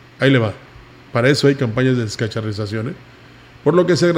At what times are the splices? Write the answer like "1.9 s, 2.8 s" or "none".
1.0 s